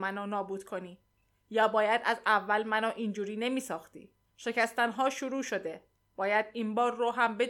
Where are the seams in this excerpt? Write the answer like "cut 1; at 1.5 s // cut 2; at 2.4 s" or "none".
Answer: cut 1; at 4.3 s